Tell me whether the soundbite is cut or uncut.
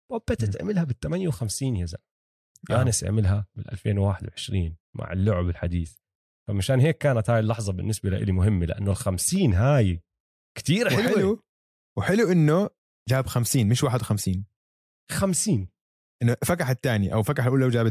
uncut